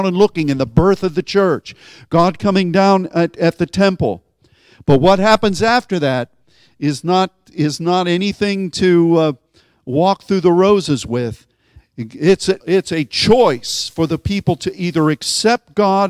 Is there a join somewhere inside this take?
yes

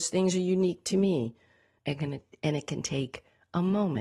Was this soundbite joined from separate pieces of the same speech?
yes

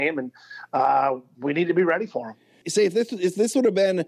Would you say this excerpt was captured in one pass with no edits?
no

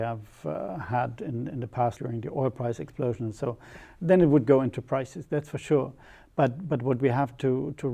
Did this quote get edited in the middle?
yes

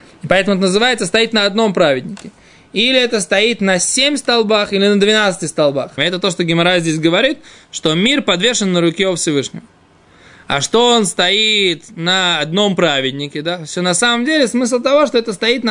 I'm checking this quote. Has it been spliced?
yes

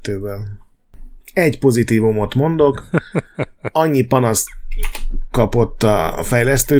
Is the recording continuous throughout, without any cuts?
no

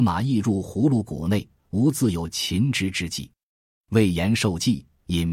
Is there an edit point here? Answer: no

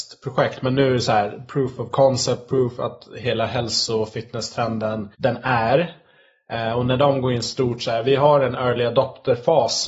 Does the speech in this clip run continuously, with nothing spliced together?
no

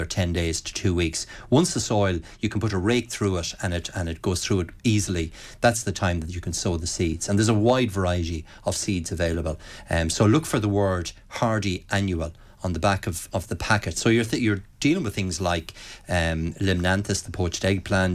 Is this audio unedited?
yes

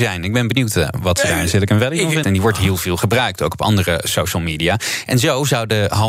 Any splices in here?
yes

